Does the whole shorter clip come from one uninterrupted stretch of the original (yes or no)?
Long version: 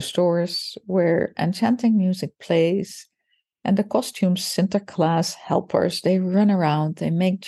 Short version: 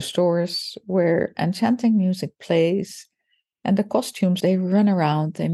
no